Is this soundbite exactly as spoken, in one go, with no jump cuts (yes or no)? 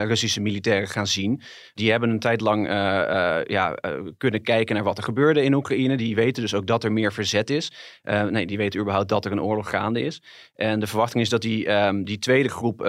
yes